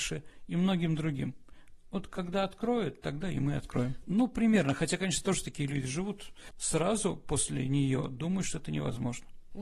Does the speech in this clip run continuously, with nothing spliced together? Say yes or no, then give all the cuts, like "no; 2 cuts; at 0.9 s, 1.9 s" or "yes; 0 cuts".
no; 2 cuts; at 4.0 s, 6.5 s